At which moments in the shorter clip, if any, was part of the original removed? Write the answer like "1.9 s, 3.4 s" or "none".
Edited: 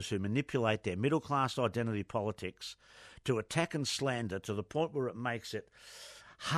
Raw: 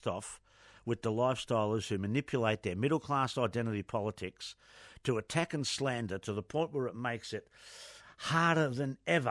none